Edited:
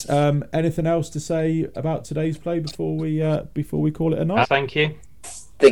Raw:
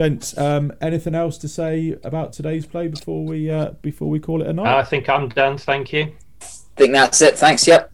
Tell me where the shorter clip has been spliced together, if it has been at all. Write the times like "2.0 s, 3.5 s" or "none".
4.4 s